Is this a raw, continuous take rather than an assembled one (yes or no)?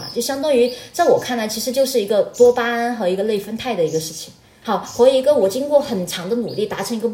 no